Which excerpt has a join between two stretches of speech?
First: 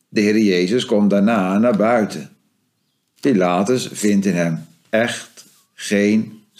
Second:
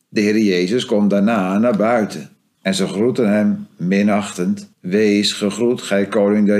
second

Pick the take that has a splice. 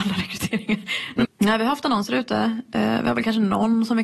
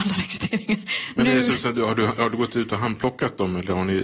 first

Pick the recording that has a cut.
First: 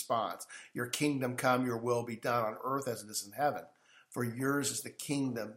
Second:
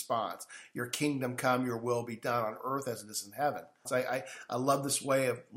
second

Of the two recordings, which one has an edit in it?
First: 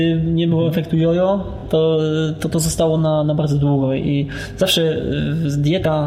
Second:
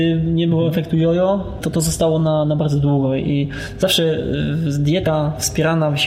second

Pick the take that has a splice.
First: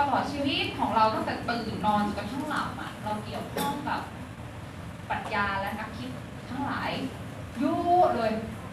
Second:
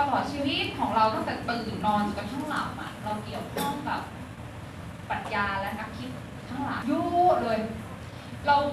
second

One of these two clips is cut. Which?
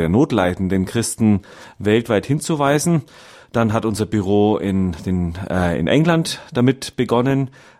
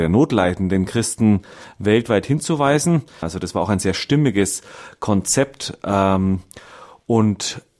second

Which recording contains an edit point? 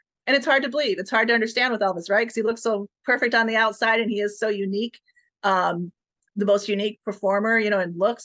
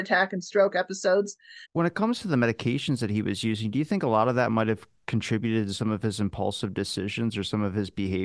second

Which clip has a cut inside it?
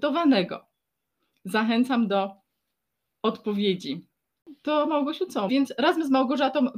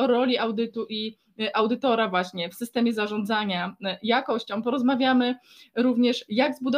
first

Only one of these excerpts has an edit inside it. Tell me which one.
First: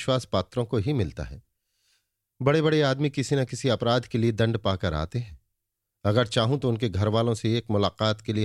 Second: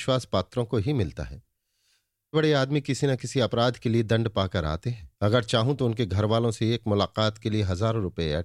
second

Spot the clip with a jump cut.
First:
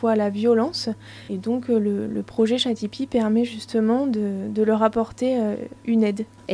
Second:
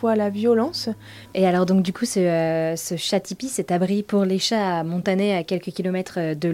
second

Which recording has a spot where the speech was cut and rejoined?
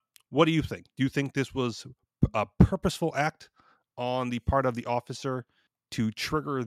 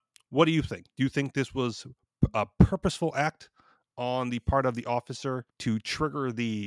second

